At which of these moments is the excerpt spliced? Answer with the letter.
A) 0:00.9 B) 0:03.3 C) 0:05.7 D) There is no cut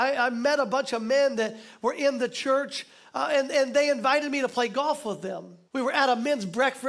C